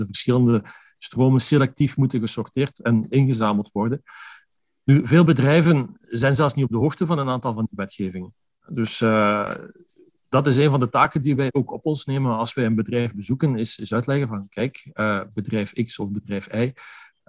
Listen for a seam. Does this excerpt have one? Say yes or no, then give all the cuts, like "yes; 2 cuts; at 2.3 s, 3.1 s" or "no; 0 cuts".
no; 0 cuts